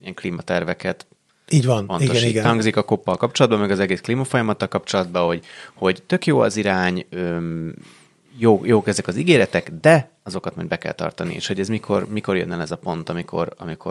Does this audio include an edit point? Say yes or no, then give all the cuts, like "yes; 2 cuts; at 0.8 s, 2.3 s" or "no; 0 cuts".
yes; 1 cut; at 2.4 s